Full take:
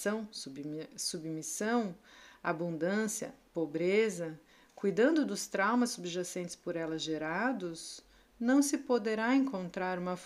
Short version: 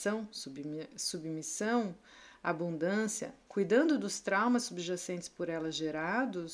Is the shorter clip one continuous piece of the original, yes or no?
no